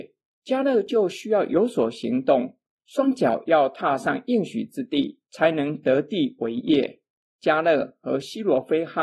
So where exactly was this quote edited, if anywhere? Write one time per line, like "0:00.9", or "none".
0:07.2